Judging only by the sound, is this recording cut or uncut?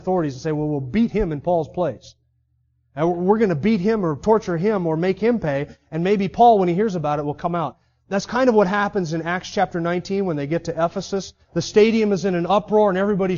uncut